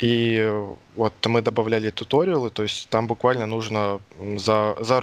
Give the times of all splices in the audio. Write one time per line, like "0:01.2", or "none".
0:04.1

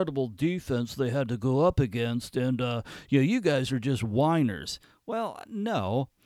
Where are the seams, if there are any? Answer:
none

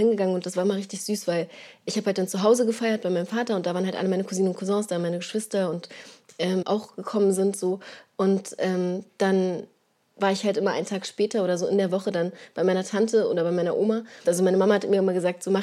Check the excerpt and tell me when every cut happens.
0:06.6
0:14.2

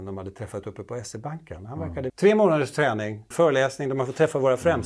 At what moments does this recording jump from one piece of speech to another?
0:02.1
0:03.3

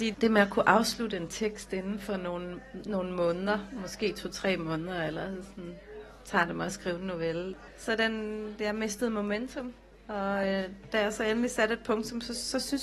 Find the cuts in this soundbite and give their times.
0:07.7

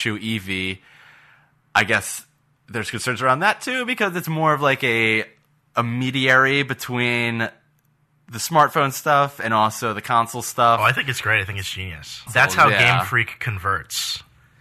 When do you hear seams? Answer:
0:12.3

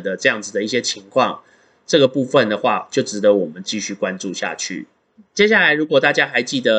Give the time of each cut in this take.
none

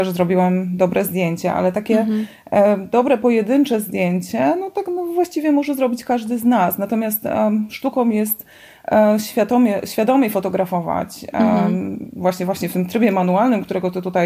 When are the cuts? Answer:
none

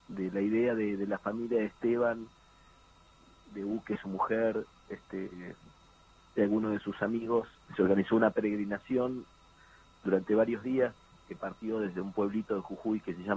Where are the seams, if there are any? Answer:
0:07.7

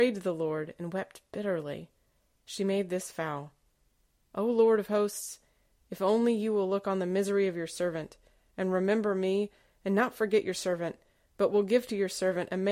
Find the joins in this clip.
none

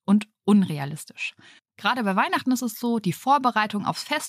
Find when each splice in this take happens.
0:01.6

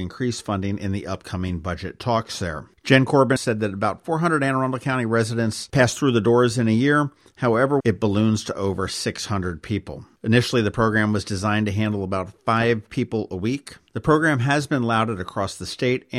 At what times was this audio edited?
0:03.4
0:07.8

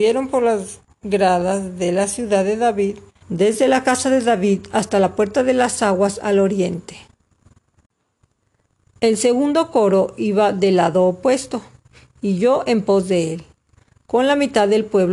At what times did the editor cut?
0:03.2

